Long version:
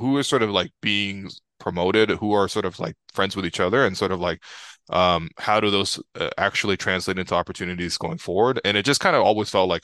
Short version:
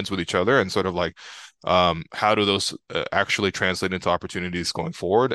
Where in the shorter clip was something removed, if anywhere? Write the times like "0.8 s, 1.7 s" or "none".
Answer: none

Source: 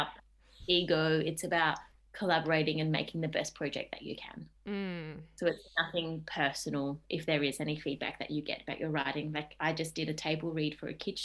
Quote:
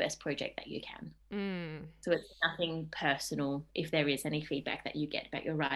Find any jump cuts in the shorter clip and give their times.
none

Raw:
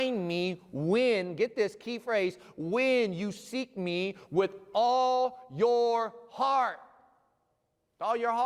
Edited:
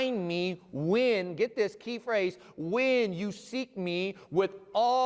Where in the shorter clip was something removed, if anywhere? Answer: none

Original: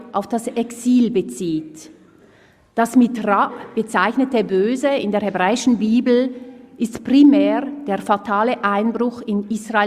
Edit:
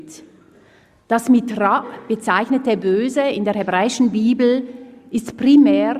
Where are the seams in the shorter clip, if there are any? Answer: none

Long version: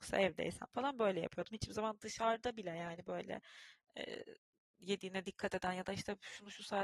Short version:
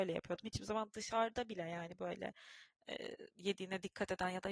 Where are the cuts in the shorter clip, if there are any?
3.3 s

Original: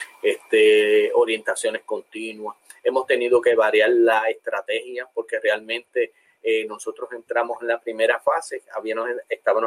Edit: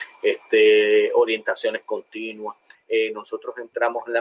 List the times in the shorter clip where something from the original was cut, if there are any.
2.7 s

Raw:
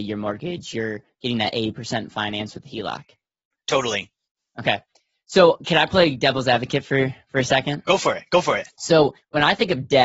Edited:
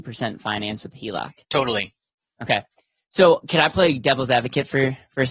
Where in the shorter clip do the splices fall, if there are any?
1.4 s

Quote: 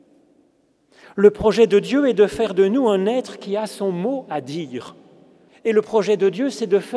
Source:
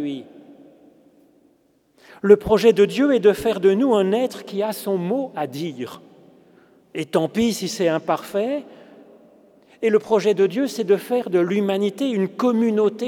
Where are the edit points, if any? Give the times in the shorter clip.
5.5 s

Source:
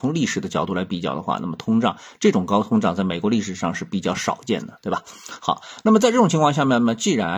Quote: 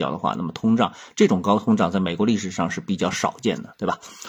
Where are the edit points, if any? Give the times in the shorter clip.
none

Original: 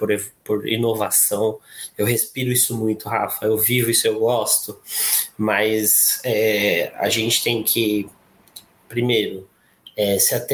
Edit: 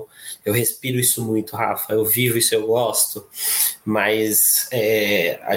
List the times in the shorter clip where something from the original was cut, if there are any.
none

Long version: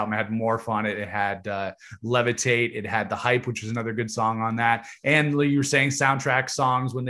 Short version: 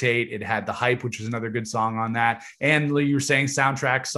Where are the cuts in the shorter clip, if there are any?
none

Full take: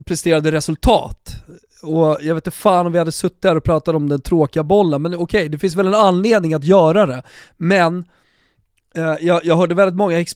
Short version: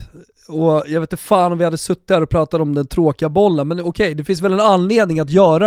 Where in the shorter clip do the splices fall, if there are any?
none

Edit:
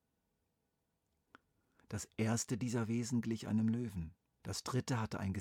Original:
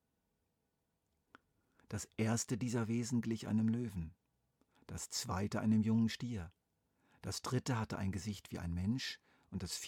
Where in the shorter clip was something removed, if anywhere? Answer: 4.4 s

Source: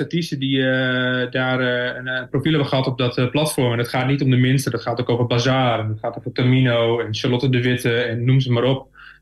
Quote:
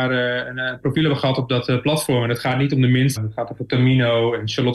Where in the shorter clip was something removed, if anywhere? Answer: 3.2 s

